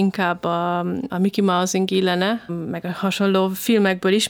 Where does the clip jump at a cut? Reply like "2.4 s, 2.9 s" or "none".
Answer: 1.1 s, 2.5 s

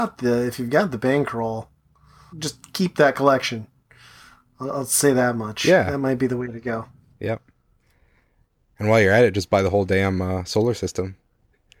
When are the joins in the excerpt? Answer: 2.3 s

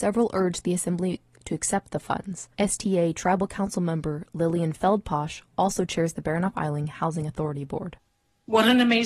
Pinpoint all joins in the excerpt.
2.5 s

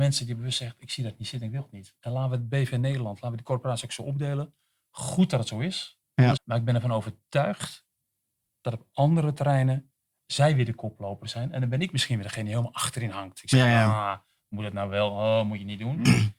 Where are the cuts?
6.4 s

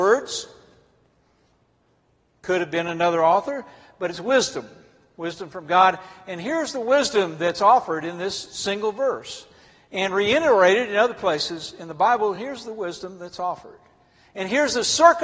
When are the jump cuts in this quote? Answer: none

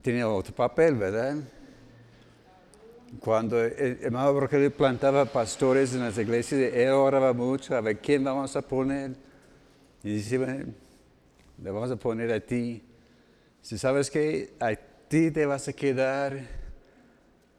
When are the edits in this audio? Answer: none

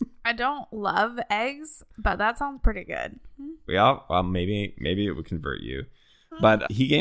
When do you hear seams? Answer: none

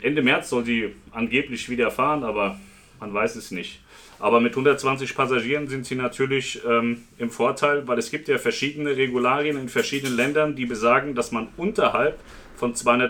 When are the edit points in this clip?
none

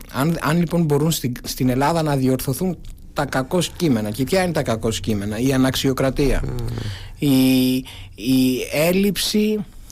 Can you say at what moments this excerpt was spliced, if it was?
none

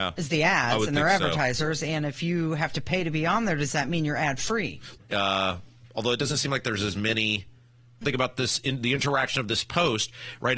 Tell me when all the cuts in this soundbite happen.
4.9 s, 8.0 s

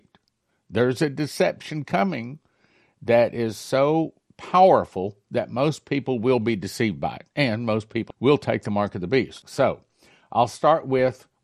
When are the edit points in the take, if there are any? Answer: 8.1 s, 9.4 s

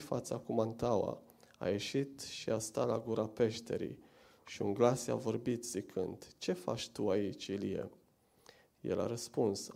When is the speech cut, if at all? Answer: none

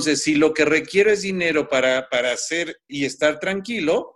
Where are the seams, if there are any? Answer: 2.9 s

